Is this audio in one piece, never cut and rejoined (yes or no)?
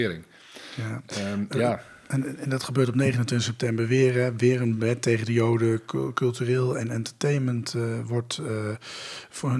yes